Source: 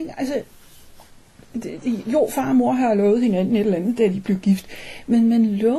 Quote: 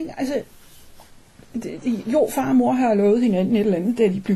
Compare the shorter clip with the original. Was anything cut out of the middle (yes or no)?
no